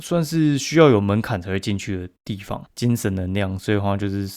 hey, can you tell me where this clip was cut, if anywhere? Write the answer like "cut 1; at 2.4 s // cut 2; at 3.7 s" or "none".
cut 1; at 2.7 s